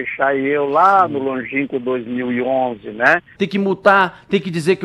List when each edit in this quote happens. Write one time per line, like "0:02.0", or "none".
0:03.3